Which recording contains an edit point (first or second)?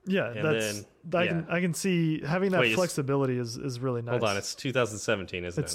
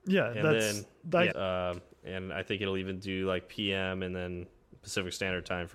second